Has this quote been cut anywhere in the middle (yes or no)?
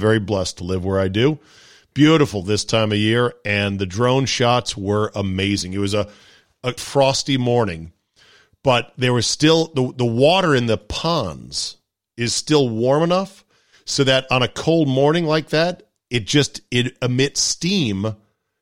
yes